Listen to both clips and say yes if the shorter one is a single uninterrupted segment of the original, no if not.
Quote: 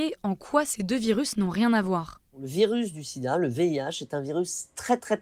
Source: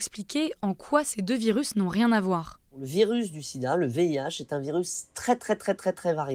yes